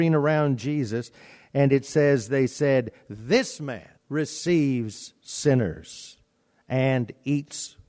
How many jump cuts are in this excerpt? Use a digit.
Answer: 1